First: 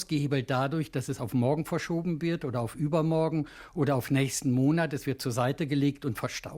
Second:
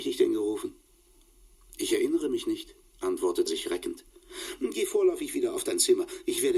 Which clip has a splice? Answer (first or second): second